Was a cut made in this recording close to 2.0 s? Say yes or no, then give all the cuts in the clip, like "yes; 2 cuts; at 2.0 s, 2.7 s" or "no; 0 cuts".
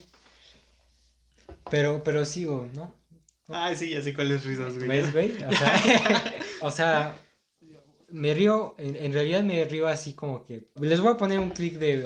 no; 3 cuts; at 3.5 s, 6.6 s, 10.8 s